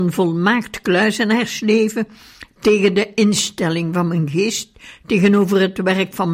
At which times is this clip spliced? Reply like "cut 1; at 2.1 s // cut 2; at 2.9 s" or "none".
none